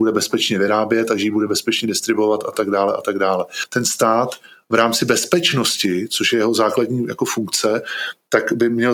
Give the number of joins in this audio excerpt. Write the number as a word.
zero